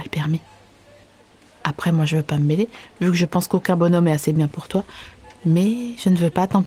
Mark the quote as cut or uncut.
uncut